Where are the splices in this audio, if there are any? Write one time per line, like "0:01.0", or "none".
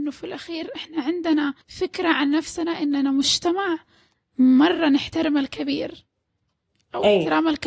0:01.6